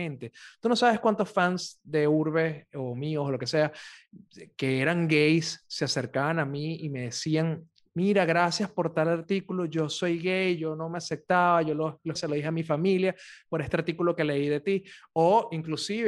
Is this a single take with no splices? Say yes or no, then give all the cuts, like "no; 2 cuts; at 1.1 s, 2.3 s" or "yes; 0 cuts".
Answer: no; 1 cut; at 12.2 s